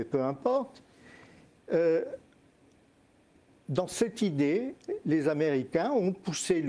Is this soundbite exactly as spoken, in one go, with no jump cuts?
no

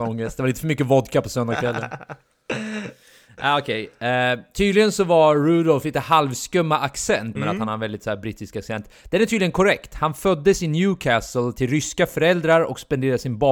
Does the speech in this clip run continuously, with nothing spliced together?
no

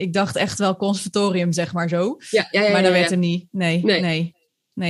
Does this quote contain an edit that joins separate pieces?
no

